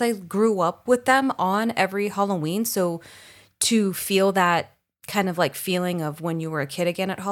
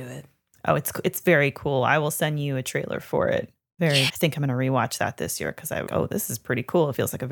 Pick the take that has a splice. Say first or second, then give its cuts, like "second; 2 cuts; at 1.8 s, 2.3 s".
second; 2 cuts; at 4.1 s, 5.9 s